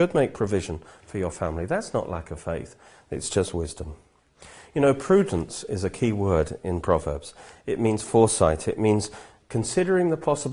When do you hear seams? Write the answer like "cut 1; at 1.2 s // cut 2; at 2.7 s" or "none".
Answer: none